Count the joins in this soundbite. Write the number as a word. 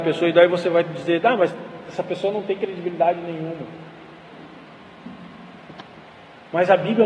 zero